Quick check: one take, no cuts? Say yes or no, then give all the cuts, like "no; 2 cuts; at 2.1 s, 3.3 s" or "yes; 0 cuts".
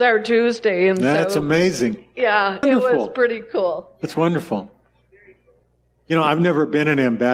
no; 1 cut; at 2.6 s